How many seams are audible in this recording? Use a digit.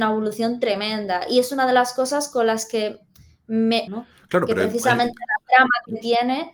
1